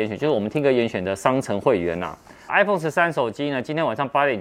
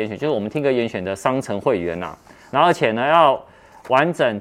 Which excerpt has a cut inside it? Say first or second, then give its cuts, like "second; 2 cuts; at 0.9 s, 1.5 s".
first; 1 cut; at 2.5 s